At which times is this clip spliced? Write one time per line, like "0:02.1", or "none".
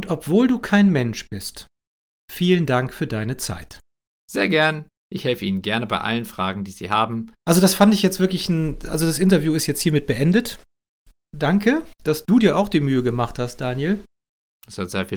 0:07.4